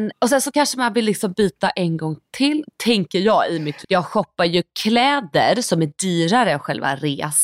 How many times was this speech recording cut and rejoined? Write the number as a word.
one